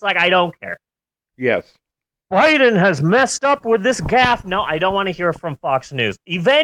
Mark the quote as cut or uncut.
uncut